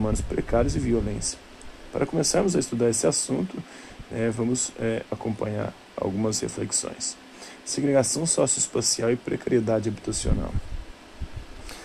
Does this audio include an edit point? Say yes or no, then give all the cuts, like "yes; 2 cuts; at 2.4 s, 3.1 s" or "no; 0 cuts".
yes; 1 cut; at 5.1 s